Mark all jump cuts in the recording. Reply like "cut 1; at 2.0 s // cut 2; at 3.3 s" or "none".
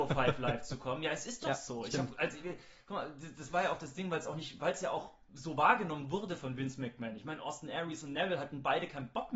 cut 1; at 2.4 s